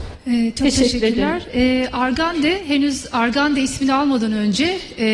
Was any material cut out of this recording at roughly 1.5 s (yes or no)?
no